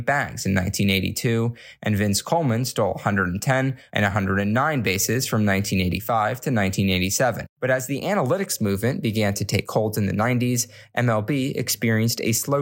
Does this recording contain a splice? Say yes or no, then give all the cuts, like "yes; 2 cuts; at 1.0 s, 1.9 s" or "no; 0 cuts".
yes; 2 cuts; at 3.9 s, 7.5 s